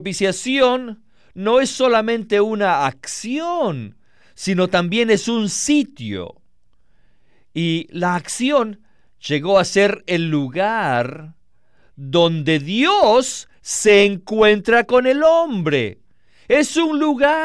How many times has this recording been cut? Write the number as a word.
zero